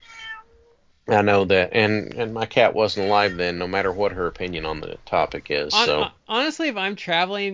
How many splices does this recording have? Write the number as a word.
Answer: zero